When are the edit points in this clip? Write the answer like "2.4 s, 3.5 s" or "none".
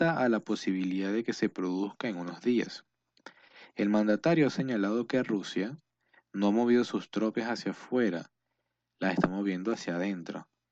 none